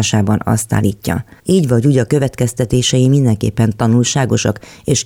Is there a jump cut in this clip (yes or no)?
yes